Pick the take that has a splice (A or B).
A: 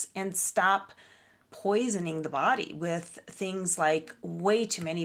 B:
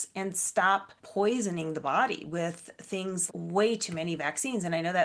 B